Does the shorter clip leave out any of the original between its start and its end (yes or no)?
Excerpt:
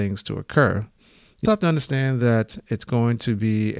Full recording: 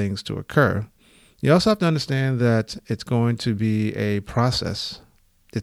yes